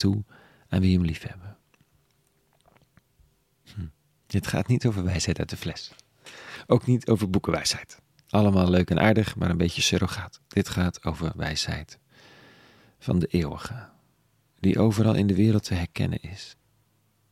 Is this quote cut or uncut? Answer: uncut